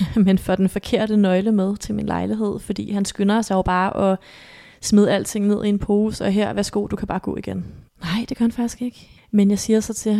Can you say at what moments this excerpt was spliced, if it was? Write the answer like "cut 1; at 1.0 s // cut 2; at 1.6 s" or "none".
cut 1; at 7.9 s // cut 2; at 9.2 s